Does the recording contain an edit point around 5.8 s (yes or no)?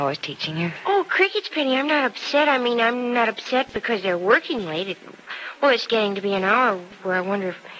yes